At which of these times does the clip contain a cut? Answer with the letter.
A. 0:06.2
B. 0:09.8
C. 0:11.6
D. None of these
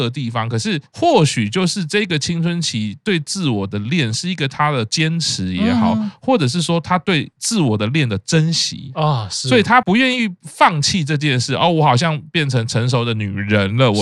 B